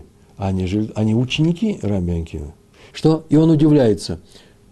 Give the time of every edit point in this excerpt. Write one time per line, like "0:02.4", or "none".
0:02.9